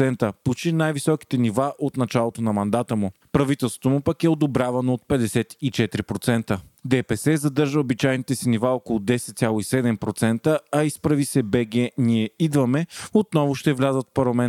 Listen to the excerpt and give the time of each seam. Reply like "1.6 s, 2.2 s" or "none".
6.8 s